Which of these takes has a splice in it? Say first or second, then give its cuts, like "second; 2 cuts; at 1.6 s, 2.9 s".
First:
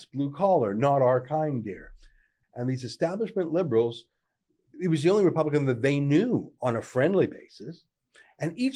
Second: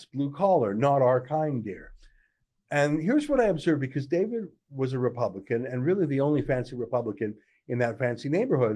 first; 2 cuts; at 2.4 s, 4.7 s